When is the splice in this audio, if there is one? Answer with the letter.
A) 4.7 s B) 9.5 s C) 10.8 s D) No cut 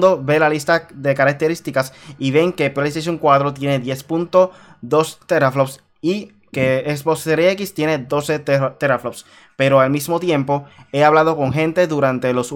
D